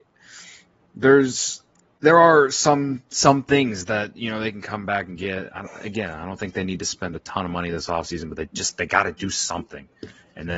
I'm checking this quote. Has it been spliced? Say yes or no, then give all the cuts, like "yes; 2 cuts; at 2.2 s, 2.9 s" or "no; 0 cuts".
no; 0 cuts